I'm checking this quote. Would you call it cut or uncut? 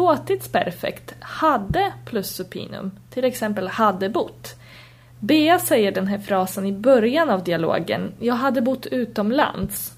uncut